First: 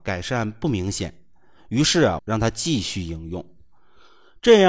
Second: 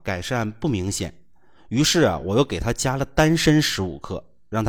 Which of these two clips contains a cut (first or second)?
first